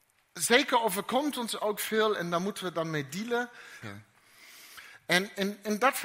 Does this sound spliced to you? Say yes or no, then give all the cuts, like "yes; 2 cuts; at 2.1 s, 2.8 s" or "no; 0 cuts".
yes; 1 cut; at 3.8 s